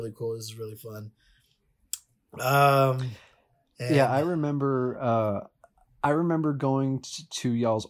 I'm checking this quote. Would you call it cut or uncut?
uncut